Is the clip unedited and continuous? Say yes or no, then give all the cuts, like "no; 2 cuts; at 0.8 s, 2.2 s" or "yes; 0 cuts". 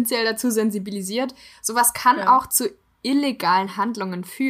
yes; 0 cuts